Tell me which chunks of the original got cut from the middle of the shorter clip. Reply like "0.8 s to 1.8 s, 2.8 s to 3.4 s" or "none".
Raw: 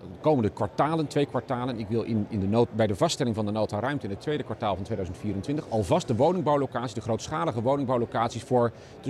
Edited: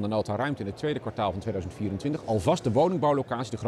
none